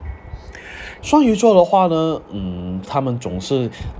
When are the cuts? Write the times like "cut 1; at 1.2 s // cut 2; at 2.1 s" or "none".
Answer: cut 1; at 1.0 s // cut 2; at 2.8 s